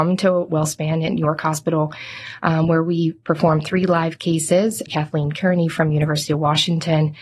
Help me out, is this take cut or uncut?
cut